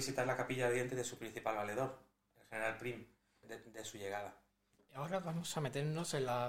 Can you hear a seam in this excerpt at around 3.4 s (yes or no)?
yes